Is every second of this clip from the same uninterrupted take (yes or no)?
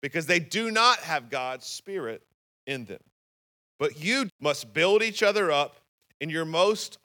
no